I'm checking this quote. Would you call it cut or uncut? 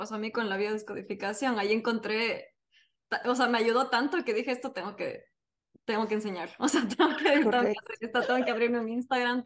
uncut